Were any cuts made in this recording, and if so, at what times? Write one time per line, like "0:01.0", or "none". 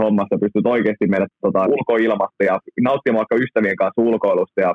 0:01.7